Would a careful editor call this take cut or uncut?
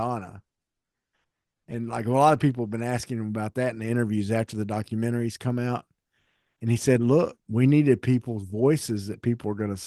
cut